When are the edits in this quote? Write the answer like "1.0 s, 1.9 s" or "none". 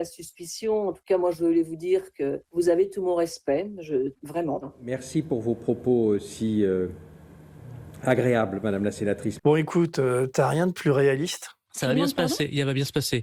2.4 s, 4.1 s, 9.4 s